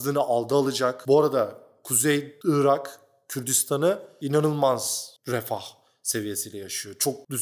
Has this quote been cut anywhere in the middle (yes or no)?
yes